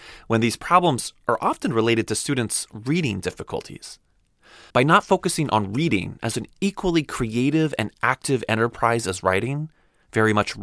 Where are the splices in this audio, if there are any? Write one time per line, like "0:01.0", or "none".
0:04.7

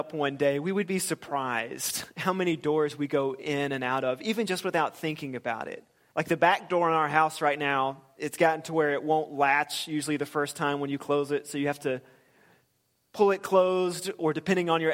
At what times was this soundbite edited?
0:06.1
0:08.2

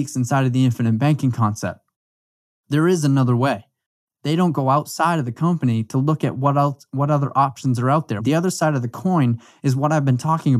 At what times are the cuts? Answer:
0:04.0
0:08.2

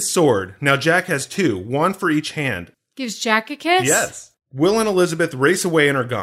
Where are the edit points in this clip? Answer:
0:02.7
0:04.3

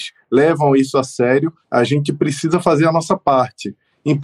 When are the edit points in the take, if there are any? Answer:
0:01.6

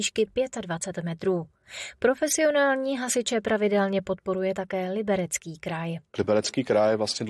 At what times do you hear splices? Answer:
none

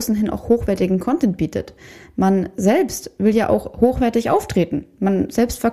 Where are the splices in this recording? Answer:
none

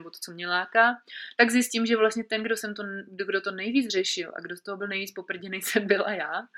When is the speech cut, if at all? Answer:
none

